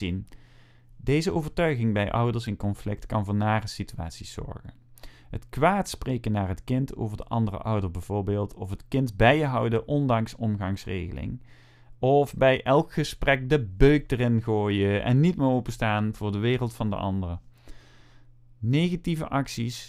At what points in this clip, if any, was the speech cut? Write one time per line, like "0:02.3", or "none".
none